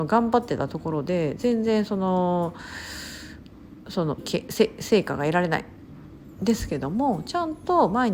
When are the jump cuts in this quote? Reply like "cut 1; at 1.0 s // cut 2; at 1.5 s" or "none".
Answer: cut 1; at 4.2 s

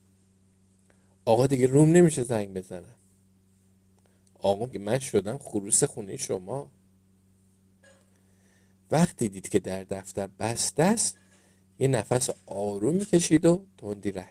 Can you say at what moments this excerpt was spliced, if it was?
cut 1; at 4.7 s

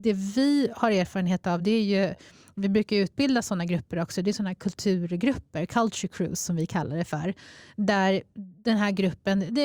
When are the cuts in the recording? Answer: none

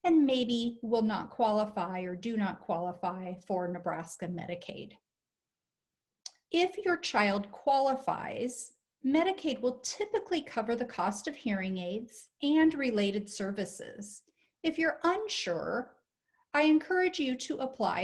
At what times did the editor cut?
cut 1; at 6.4 s

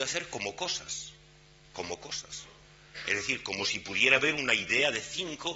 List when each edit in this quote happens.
none

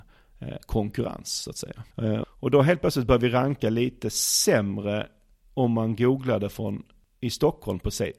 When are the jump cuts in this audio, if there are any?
cut 1; at 2.2 s

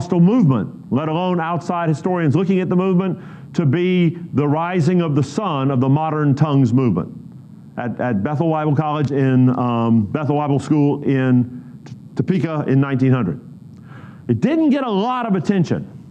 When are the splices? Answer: cut 1; at 12.1 s

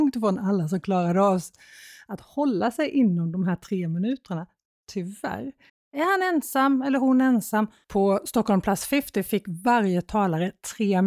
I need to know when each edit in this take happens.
cut 1; at 5.7 s // cut 2; at 7.8 s

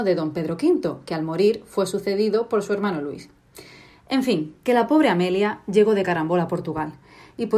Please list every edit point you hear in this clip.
none

